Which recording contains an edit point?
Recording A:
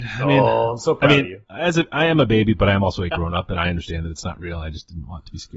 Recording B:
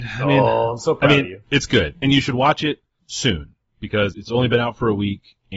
B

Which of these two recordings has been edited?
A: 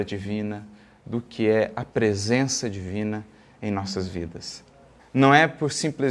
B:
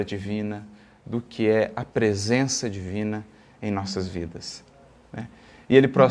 A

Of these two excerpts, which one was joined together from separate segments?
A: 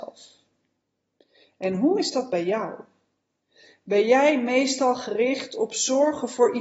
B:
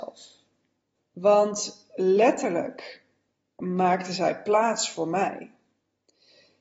B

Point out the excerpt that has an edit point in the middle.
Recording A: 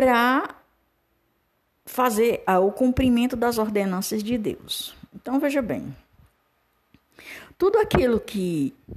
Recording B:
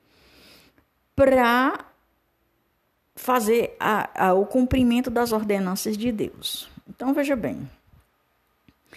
A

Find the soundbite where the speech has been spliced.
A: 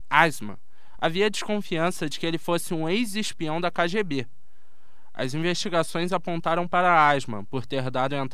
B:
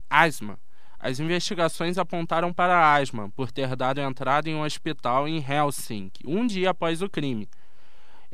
B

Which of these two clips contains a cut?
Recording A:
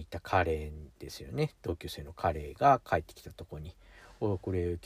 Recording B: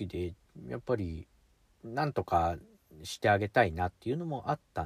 A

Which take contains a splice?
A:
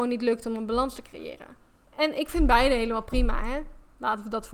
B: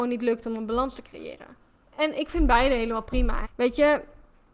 B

